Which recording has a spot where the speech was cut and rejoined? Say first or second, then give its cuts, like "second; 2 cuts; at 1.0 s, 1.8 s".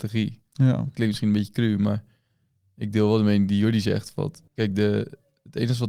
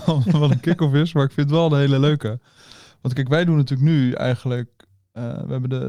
first; 1 cut; at 4.5 s